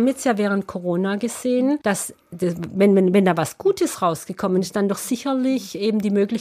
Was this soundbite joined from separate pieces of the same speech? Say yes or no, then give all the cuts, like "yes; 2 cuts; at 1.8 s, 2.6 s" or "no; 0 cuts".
yes; 1 cut; at 1.8 s